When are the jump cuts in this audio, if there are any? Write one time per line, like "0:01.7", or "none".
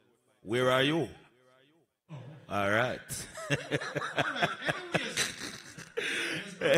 none